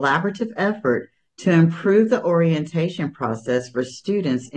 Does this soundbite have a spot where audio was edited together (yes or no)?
no